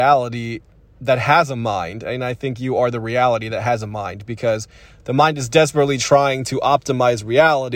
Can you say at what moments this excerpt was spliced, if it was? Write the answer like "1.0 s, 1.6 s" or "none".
none